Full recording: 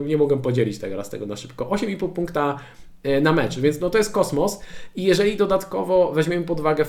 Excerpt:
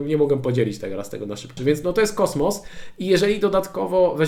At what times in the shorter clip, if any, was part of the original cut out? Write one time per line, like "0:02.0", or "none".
0:01.6